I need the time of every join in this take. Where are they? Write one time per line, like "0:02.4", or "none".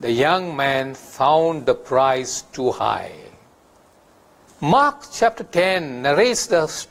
0:04.5